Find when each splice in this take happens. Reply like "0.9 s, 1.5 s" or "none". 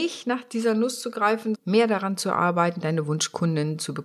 1.6 s